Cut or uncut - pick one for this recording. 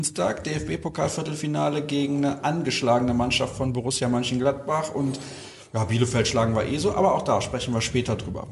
uncut